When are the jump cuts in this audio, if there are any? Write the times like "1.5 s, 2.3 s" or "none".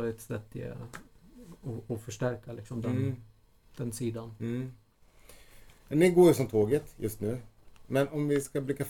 none